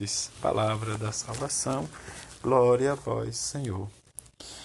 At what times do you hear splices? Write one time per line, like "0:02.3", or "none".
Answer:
none